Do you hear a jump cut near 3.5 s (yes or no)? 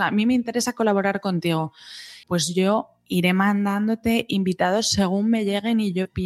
no